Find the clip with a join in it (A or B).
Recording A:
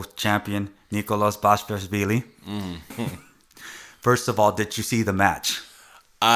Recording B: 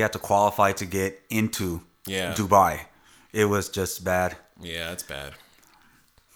A